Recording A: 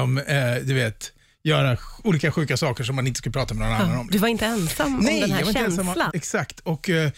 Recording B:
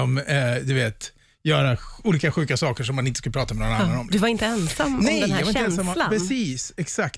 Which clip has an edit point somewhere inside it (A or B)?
A